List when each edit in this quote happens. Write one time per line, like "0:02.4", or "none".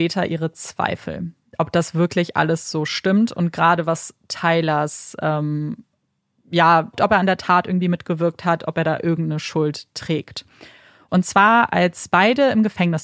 0:06.9
0:11.1